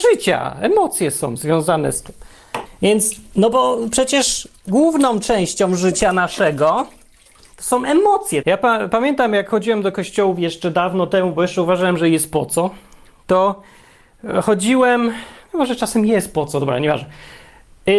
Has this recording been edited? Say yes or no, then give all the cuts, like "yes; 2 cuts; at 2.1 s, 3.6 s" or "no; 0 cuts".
yes; 2 cuts; at 2.7 s, 8.4 s